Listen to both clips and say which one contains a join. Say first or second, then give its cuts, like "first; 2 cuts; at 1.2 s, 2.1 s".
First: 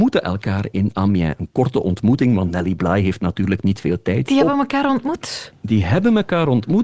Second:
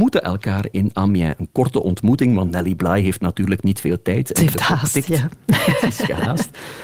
first; 1 cut; at 4.3 s